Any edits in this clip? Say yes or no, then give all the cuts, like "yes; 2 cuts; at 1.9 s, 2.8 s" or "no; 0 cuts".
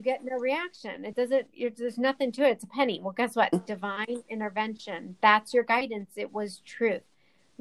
yes; 1 cut; at 3.5 s